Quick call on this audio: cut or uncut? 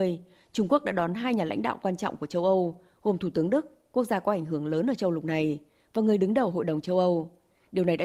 uncut